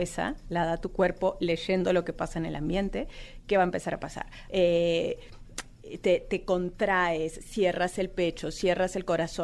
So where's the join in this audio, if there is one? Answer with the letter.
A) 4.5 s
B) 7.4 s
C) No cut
A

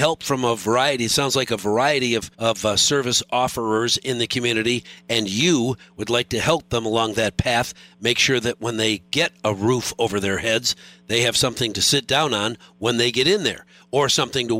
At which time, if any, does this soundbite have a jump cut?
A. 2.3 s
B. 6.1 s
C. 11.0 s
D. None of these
A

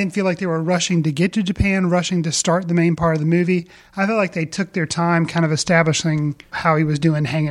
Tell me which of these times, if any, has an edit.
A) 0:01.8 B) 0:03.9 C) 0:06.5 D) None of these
C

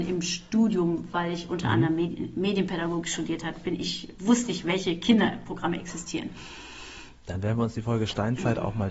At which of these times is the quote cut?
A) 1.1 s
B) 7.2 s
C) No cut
B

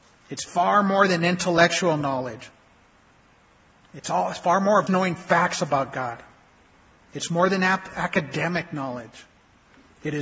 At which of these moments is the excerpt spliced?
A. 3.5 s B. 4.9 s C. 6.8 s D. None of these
B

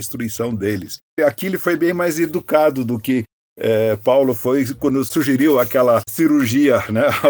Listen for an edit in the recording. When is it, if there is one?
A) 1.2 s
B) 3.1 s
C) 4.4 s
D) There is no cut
A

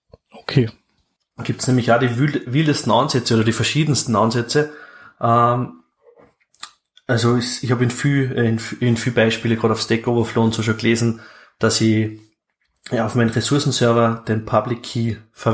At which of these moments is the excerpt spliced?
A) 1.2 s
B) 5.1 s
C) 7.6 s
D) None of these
A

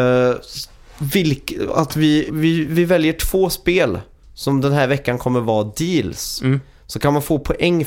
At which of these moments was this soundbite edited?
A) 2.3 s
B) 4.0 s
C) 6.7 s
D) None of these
A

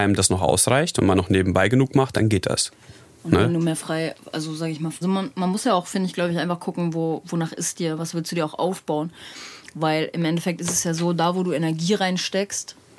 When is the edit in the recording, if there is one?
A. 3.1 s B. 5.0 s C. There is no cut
B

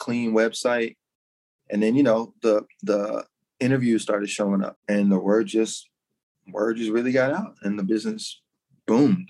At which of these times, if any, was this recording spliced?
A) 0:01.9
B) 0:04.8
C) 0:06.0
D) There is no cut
B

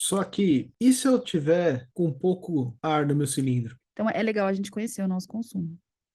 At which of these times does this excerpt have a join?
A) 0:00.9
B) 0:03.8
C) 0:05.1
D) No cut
B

